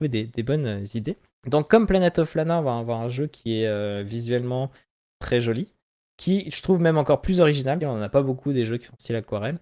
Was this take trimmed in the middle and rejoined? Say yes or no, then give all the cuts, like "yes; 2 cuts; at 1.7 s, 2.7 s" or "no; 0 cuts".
yes; 1 cut; at 7.8 s